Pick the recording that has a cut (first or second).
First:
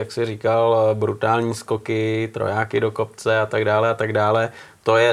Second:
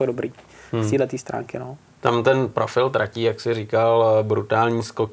second